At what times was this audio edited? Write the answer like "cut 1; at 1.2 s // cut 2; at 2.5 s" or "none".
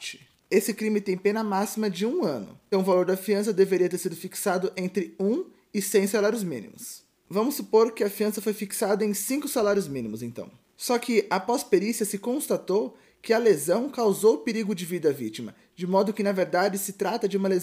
cut 1; at 2.7 s